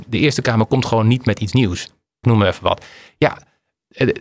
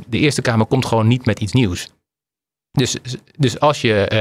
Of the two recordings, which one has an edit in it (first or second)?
first